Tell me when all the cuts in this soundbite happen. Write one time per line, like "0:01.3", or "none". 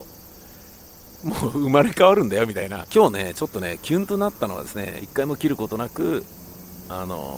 0:02.9
0:05.0